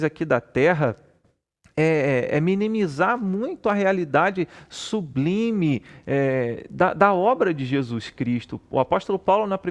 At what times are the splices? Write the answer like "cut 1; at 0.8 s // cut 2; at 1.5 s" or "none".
none